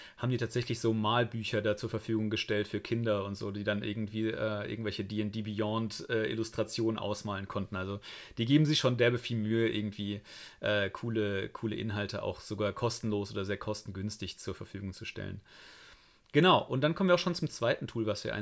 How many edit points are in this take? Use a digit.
0